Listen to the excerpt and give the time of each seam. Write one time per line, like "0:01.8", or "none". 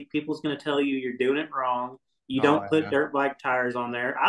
none